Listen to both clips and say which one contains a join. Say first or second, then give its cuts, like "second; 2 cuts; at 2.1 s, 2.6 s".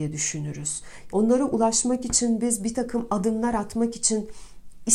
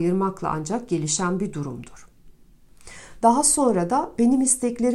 first; 1 cut; at 1.1 s